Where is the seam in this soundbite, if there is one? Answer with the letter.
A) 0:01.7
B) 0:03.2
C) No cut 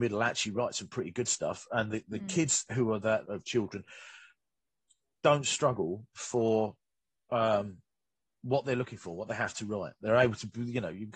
B